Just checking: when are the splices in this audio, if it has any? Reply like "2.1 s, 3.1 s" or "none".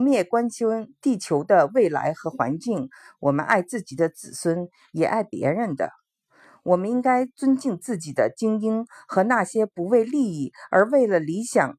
none